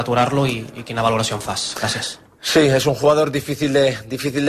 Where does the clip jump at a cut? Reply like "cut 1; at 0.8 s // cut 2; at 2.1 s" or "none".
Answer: none